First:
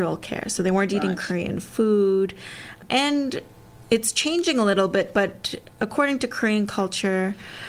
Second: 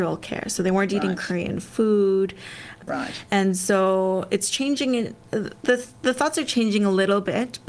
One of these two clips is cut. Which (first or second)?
second